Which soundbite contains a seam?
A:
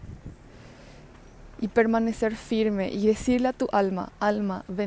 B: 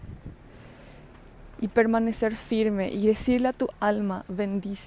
B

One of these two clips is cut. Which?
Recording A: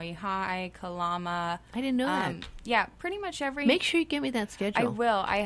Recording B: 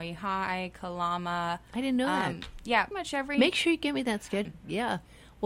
B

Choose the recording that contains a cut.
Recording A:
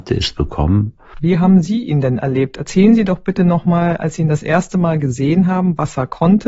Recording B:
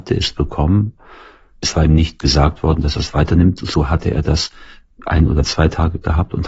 A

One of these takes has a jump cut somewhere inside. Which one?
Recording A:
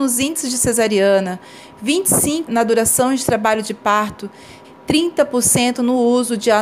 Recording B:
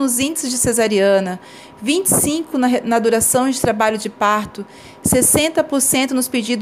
A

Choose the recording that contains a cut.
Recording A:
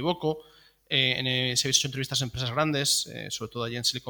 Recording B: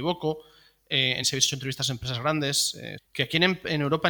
B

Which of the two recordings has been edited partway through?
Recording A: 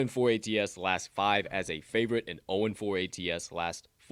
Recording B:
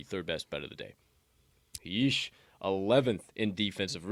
B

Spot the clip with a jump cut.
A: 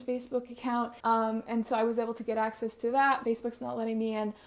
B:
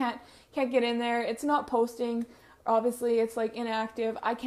A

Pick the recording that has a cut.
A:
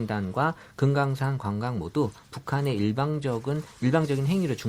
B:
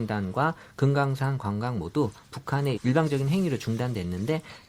B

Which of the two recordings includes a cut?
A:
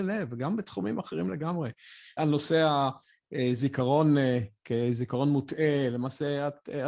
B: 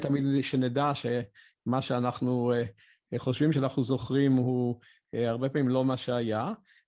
A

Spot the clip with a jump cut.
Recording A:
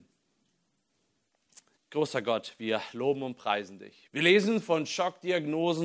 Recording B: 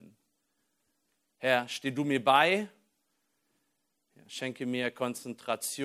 A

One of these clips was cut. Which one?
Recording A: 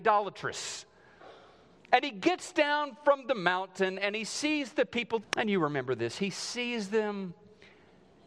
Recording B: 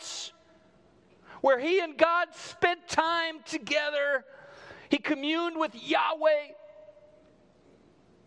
A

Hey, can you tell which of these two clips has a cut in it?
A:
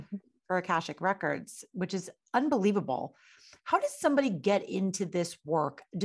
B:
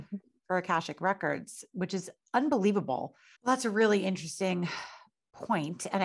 B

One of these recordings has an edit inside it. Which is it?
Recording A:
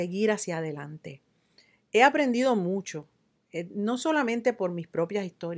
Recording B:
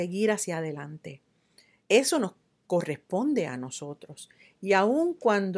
B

